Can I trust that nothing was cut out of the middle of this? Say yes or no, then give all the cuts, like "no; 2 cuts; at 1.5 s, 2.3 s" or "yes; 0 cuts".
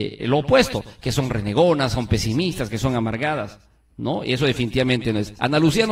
yes; 0 cuts